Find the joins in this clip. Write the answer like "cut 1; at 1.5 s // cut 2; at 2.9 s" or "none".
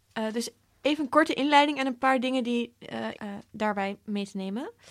cut 1; at 3.1 s